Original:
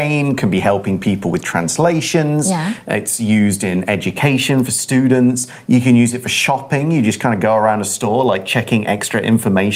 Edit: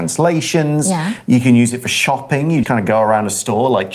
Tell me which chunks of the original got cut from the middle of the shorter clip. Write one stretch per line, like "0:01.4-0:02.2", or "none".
0:02.8-0:05.6
0:07.0-0:07.2